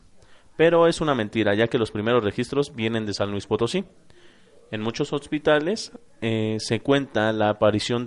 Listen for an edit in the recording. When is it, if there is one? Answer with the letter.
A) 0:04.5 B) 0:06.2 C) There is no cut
C